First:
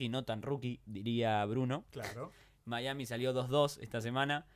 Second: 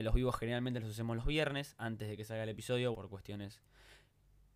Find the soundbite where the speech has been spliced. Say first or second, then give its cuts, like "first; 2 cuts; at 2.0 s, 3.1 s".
second; 1 cut; at 2.9 s